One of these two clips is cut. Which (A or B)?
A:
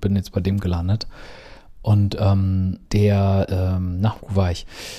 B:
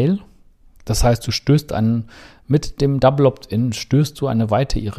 A